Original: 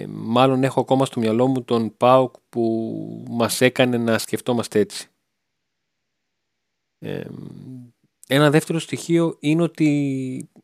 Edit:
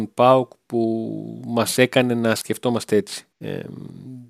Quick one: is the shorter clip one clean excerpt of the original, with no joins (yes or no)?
no